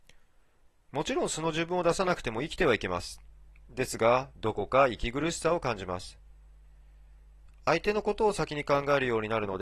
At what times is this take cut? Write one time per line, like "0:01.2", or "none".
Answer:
0:04.3